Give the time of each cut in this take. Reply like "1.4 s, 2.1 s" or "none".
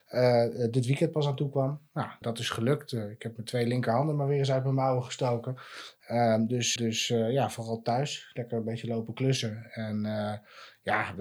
2.2 s, 6.8 s